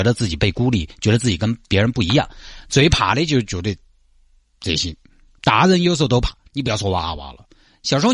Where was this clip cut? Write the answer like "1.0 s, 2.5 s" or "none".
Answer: none